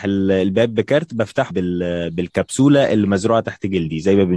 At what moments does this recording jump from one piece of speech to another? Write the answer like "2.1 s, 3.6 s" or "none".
1.5 s